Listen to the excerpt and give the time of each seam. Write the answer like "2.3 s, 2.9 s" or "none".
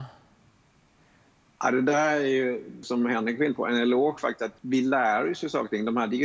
2.8 s, 4.6 s